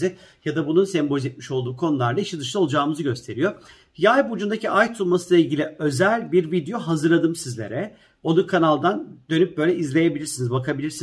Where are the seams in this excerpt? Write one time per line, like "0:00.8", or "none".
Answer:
none